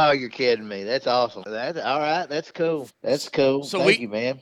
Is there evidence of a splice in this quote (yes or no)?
yes